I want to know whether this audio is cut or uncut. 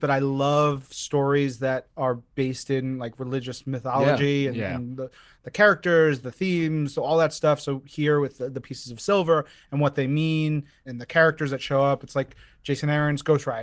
uncut